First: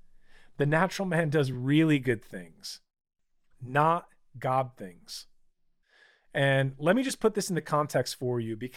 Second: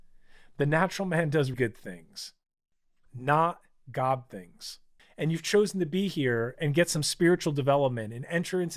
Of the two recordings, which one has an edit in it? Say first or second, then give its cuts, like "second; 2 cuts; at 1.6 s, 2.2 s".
second; 2 cuts; at 1.5 s, 5.0 s